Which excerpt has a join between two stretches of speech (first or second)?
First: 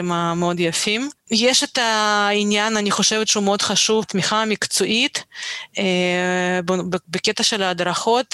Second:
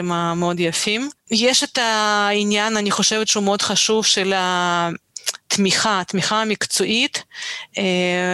first